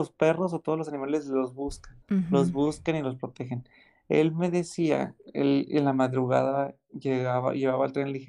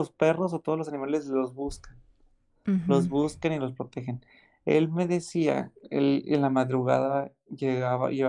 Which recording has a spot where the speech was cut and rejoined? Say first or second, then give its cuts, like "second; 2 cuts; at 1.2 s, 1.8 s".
first; 1 cut; at 2.0 s